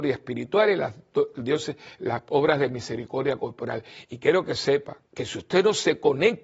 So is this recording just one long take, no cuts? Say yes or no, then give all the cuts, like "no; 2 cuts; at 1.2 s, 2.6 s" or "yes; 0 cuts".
no; 1 cut; at 5.0 s